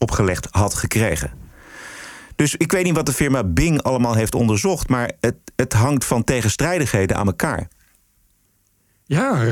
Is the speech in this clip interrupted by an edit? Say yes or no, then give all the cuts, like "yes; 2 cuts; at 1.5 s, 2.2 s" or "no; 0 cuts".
no; 0 cuts